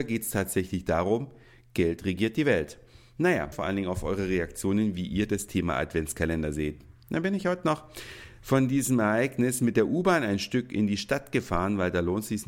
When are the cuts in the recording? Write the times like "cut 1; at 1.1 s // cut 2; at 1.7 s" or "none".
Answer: cut 1; at 3.5 s